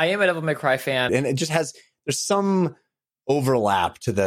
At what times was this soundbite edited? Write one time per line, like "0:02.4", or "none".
0:01.1